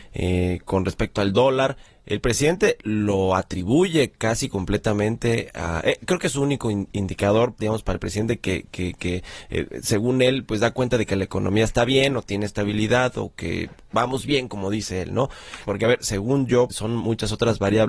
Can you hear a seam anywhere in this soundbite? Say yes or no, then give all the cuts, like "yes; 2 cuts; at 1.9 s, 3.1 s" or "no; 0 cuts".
yes; 2 cuts; at 15.6 s, 16.7 s